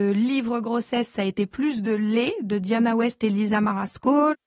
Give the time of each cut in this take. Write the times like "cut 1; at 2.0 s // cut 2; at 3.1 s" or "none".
none